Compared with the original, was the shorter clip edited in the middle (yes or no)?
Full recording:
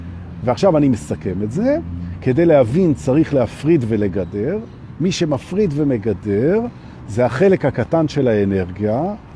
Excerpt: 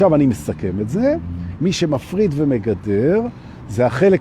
yes